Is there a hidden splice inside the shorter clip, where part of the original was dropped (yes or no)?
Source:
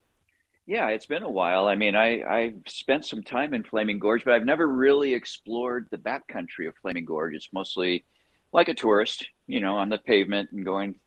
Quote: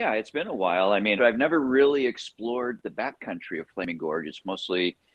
yes